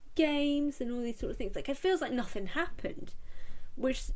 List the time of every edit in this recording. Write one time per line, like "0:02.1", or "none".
none